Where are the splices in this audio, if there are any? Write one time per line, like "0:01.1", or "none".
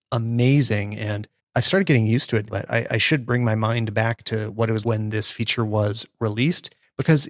0:02.5
0:04.8

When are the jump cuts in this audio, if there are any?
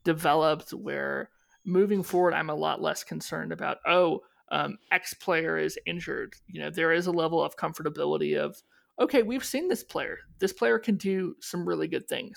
none

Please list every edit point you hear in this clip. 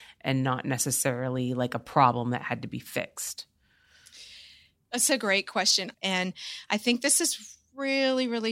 0:05.9

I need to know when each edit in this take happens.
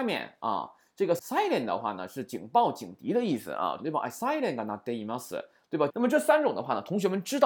0:01.2
0:03.8
0:05.9

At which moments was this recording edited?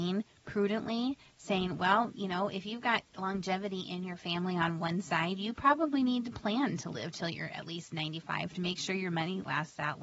none

